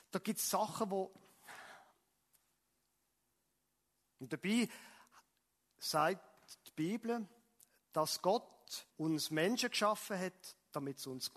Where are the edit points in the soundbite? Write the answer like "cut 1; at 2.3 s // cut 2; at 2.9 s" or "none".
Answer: cut 1; at 8.9 s